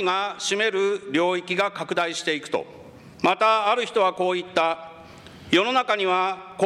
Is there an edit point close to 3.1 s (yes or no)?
yes